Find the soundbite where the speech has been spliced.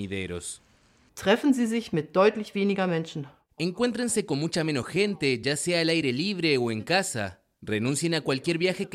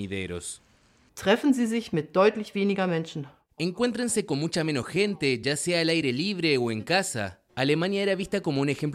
second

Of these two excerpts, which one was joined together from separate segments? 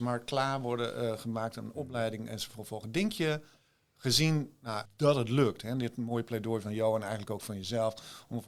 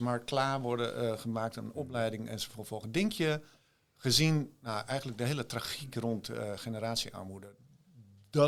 first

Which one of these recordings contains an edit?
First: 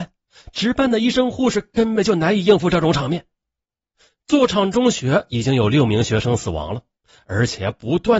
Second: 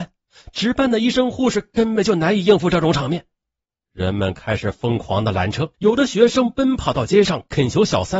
second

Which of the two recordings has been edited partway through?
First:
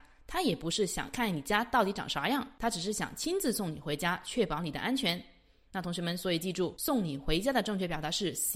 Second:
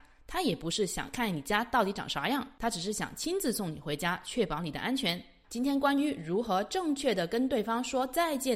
second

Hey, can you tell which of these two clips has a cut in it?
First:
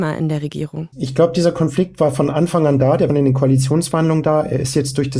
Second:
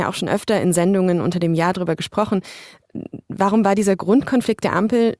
first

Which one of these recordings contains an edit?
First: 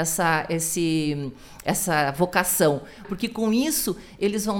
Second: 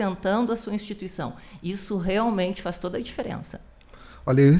first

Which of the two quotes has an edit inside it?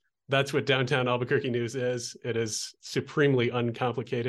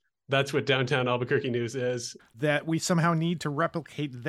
second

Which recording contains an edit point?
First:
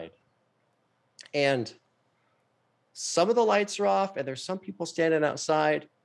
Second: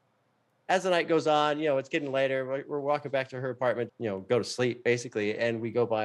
second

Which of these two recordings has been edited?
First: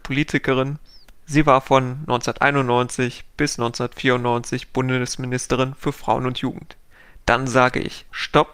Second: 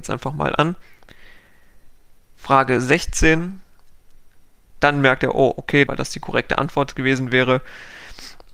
second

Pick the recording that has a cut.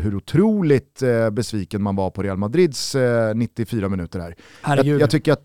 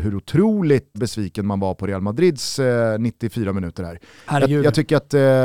second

